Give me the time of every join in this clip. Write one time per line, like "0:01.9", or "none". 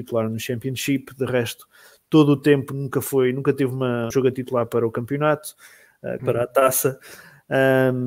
0:04.1
0:06.2